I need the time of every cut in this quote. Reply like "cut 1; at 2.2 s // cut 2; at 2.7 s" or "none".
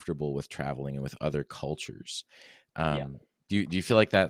none